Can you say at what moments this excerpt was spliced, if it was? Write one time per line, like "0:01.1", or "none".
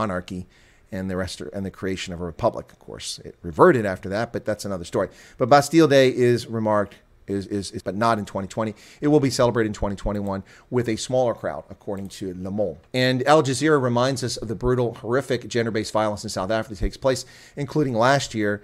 0:07.8
0:12.9

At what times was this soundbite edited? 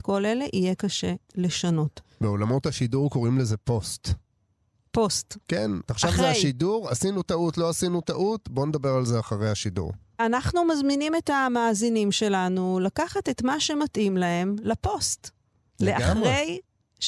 0:05.9

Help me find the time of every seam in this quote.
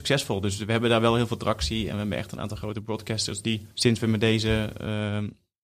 0:03.7

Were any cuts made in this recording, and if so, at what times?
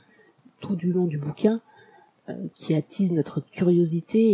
0:02.5

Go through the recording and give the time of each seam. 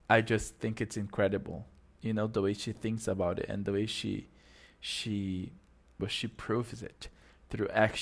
0:06.0

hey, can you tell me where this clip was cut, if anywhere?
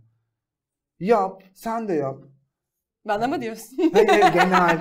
none

